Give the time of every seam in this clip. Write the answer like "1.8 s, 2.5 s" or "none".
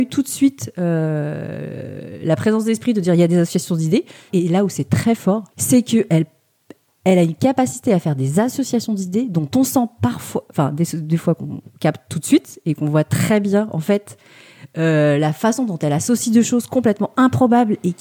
4.3 s, 5.5 s